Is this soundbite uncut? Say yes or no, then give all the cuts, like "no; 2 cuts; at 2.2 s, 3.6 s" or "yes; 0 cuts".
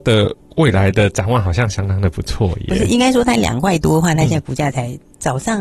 yes; 0 cuts